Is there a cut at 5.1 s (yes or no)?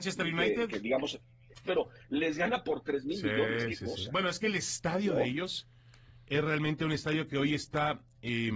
no